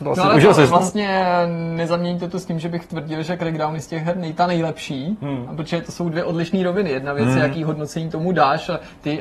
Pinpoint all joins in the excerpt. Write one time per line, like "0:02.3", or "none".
none